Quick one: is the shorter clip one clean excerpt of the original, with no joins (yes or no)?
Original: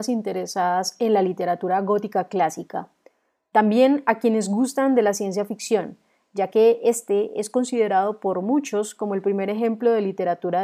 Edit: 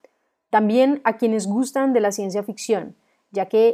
yes